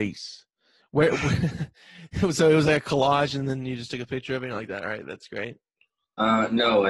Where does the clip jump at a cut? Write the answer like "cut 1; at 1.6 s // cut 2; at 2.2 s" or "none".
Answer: none

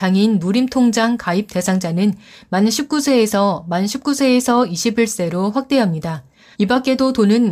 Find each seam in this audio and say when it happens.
cut 1; at 6.5 s

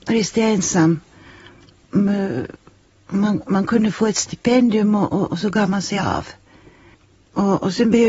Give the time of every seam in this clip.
none

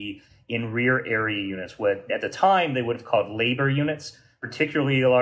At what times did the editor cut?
none

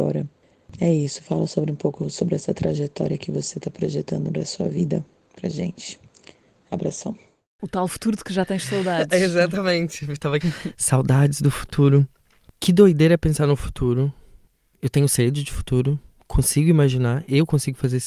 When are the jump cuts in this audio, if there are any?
cut 1; at 10.4 s

